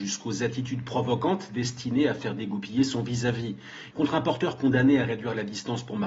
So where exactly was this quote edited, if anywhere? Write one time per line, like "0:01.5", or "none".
0:03.9